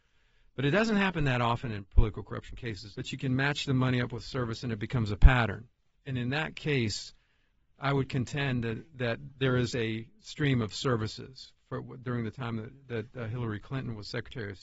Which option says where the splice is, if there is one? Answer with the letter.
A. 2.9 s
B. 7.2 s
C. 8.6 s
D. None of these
A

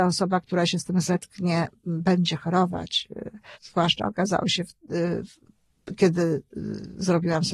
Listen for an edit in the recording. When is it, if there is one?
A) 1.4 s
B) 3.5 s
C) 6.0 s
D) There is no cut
B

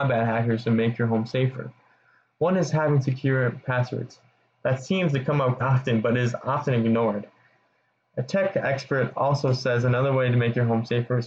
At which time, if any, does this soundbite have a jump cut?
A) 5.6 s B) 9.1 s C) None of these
A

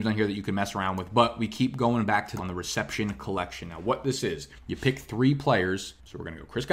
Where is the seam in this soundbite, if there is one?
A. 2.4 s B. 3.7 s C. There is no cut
A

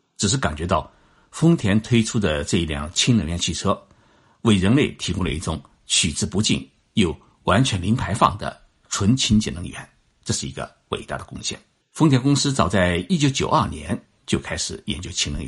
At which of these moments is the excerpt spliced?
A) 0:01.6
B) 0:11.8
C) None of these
B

